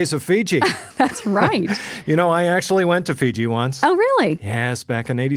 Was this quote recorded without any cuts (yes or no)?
yes